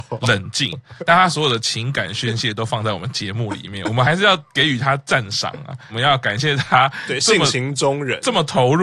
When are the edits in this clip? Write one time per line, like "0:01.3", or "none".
none